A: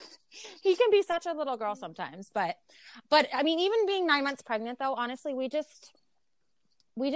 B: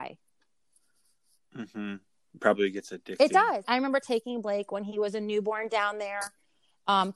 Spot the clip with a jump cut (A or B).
B